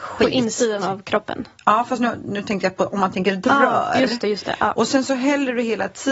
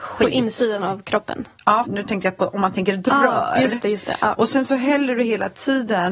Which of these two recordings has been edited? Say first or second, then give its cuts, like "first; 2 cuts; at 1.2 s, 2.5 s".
second; 1 cut; at 1.8 s